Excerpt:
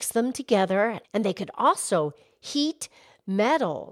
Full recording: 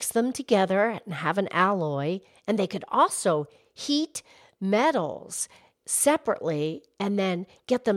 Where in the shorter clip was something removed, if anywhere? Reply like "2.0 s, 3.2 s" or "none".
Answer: 1.0 s